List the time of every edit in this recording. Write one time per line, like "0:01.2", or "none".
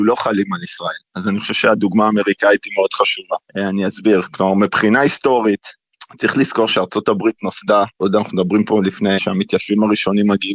0:03.5
0:09.2